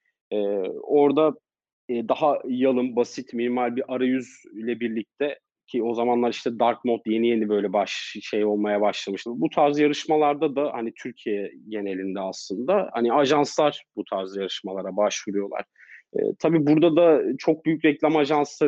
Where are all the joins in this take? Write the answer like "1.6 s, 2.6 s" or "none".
9.3 s